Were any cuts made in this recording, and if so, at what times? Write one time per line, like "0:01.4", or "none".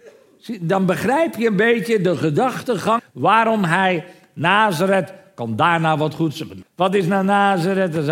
0:03.0
0:06.6

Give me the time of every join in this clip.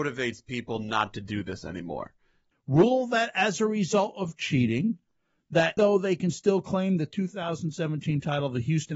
0:02.5
0:05.8

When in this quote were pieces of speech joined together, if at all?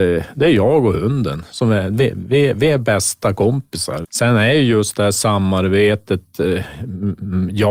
0:04.0

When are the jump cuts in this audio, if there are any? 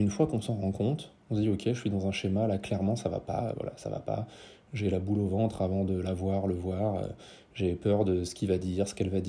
0:03.5

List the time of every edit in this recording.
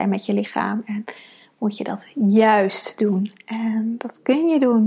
none

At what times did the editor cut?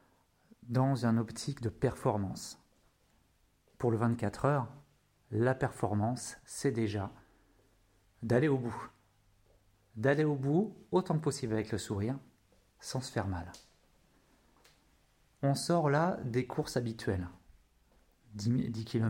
none

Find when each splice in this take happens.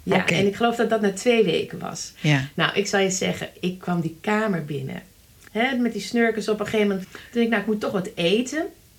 0:05.5
0:07.0

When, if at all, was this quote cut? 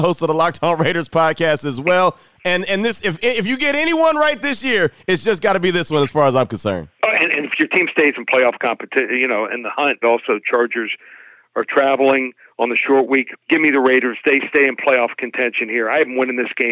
0:10.0
0:13.4

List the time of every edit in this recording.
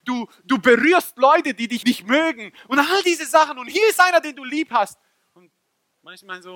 0:01.8

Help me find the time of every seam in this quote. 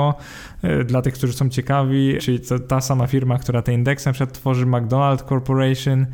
0:02.2

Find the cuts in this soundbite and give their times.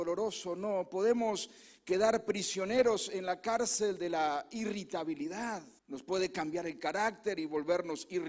0:05.8

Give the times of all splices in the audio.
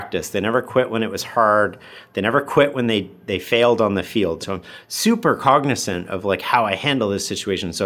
0:04.4

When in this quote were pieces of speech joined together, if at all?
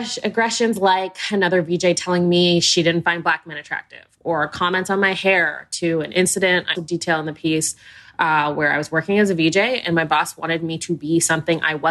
0:06.7

